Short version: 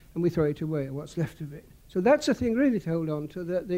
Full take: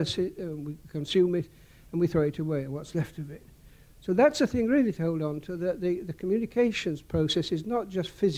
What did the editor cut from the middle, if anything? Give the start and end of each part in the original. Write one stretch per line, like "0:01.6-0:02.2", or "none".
0:03.6-0:03.9